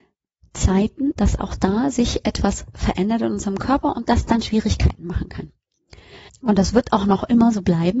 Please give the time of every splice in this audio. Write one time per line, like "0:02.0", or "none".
0:01.1
0:06.3